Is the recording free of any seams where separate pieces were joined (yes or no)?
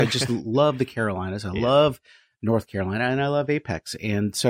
yes